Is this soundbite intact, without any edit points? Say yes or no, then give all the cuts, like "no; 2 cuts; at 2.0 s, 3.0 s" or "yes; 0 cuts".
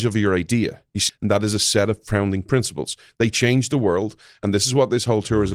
no; 1 cut; at 1.1 s